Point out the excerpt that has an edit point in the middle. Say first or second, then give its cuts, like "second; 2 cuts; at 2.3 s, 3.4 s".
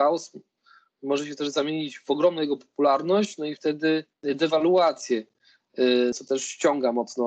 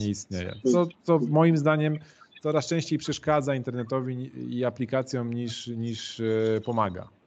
first; 2 cuts; at 4.1 s, 6.1 s